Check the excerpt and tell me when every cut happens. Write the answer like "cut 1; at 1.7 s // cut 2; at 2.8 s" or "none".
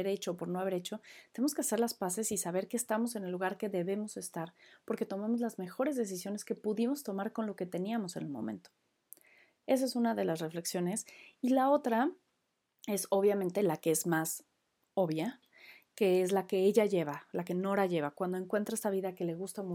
none